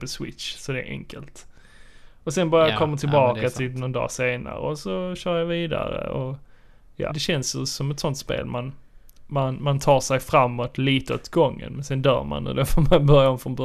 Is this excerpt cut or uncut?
cut